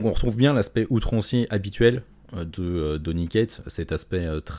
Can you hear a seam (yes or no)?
no